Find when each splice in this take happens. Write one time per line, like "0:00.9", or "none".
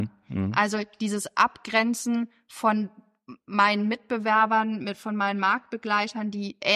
none